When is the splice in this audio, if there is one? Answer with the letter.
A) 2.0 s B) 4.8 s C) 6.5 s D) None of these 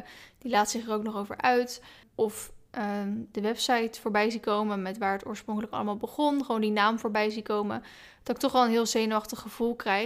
A